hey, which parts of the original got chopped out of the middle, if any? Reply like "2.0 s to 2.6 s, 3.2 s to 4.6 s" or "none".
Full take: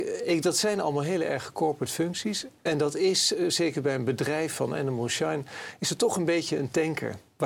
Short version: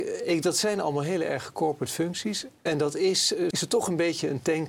3.5 s to 5.8 s